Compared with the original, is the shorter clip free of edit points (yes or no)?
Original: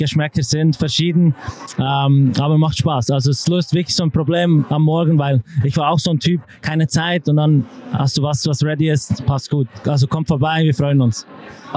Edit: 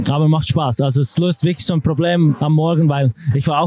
yes